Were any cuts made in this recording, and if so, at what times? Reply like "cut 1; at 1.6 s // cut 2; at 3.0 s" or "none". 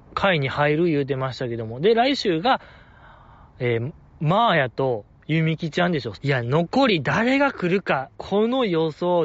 cut 1; at 6.2 s // cut 2; at 8.1 s